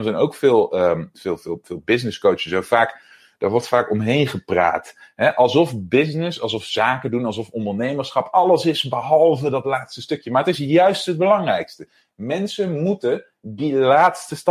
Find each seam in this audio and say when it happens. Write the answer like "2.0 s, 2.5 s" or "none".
none